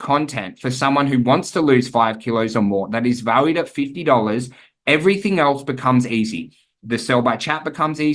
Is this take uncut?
yes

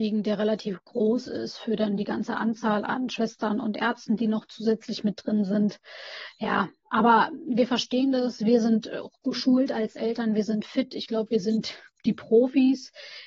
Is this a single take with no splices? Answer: yes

